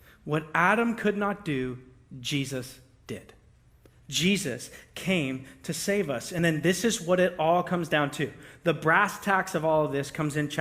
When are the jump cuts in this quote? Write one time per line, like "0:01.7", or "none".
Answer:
none